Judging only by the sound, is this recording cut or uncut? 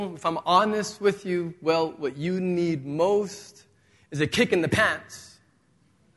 uncut